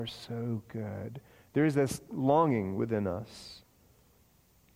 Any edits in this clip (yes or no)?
no